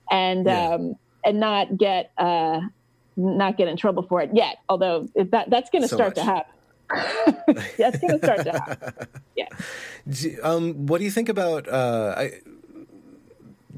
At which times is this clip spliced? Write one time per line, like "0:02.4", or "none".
none